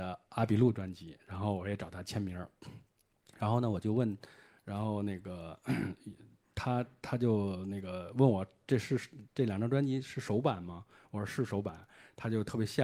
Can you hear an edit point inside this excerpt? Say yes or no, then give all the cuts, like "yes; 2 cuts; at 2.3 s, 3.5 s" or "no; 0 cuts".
no; 0 cuts